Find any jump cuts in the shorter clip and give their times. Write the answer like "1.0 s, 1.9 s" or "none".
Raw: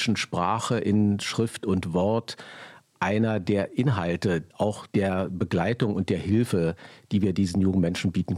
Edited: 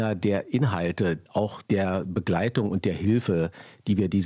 none